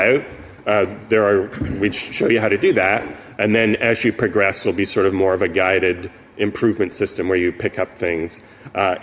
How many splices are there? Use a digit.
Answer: 0